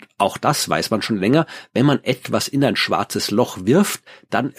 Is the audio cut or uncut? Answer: uncut